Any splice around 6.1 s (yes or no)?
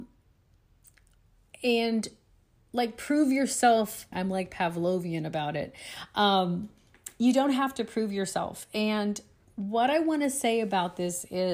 no